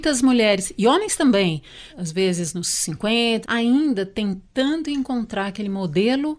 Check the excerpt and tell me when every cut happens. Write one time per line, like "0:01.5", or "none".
0:01.9
0:03.4

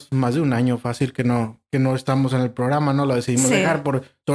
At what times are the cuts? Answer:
none

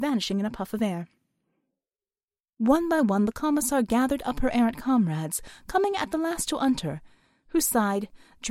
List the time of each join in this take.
none

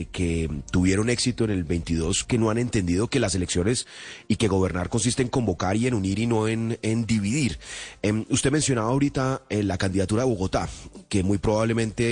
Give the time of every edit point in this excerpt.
none

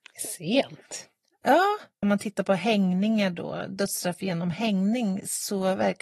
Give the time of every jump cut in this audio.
0:02.0

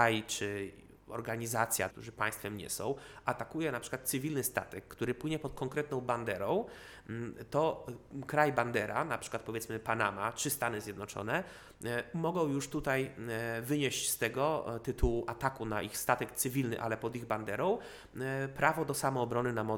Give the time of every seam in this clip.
0:01.9

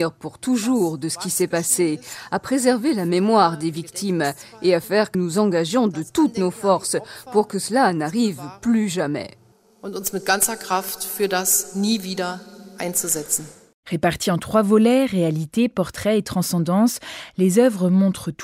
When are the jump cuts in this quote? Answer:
0:05.1

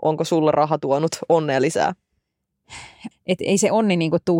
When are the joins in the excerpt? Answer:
0:03.1

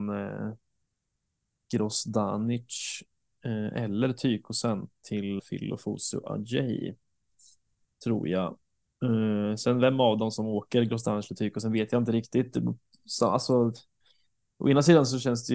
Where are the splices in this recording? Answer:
0:05.4

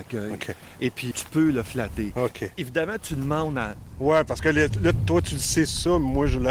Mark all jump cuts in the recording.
0:01.1

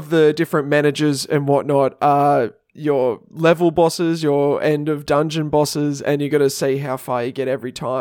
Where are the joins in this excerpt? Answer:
none

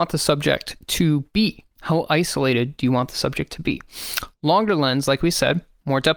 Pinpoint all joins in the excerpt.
0:01.7

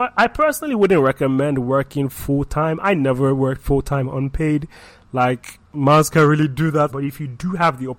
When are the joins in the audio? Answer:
0:06.9

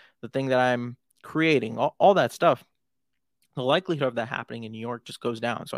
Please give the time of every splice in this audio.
none

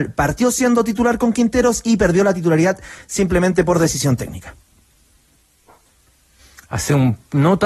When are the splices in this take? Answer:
none

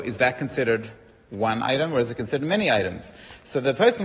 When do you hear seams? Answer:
none

